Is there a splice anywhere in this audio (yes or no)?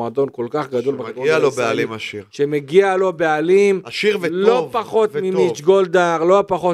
no